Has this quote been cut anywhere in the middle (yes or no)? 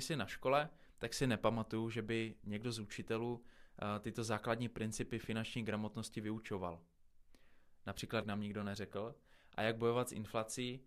yes